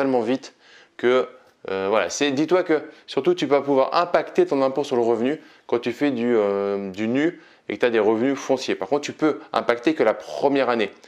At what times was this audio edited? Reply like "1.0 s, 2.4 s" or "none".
none